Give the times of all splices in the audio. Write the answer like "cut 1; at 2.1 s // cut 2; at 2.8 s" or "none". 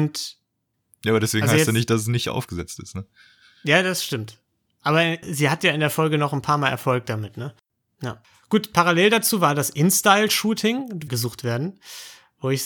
cut 1; at 7.9 s // cut 2; at 11.1 s